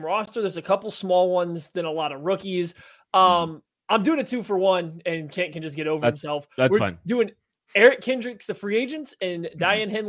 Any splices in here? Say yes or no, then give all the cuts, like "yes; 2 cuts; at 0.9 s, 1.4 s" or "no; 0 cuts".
no; 0 cuts